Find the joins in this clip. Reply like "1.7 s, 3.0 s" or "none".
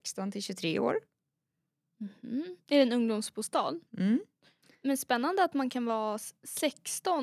3.9 s